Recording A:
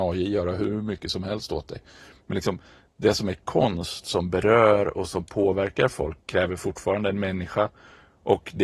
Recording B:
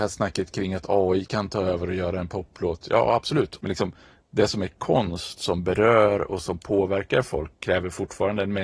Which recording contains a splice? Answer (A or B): B